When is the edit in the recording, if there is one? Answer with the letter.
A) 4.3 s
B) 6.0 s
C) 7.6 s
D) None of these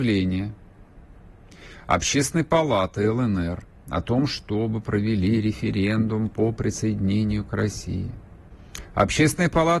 A